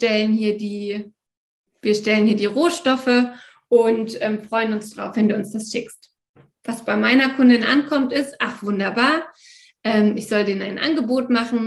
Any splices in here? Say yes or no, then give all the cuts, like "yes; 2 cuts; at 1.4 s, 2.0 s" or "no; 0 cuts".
no; 0 cuts